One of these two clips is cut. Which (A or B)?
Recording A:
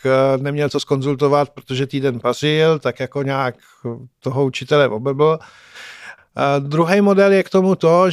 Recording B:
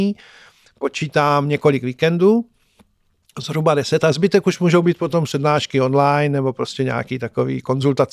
A